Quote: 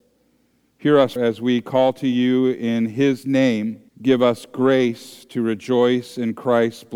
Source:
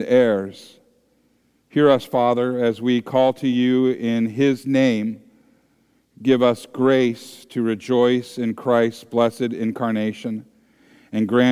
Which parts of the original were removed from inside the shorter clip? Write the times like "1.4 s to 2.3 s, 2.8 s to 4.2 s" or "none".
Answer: 2.1 s to 2.6 s, 5.3 s to 6.1 s